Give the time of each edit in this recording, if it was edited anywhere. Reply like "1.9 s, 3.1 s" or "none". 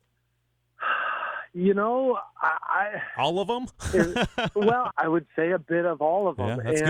4.9 s